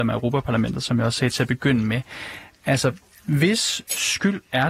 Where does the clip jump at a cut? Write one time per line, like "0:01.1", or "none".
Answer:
none